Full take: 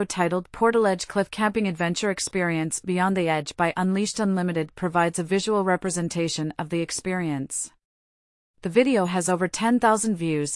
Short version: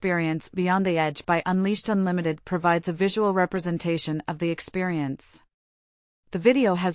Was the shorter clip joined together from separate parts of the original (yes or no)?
no